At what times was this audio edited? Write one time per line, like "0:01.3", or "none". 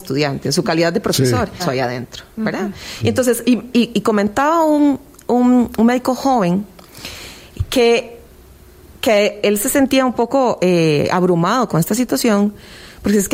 0:01.6